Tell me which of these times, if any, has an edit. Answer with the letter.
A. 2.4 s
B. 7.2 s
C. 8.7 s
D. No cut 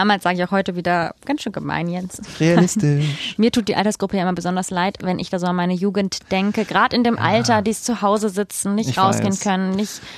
D